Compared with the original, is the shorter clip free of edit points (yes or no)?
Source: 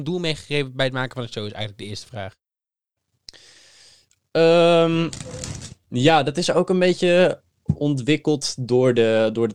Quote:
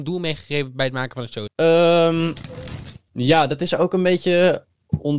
no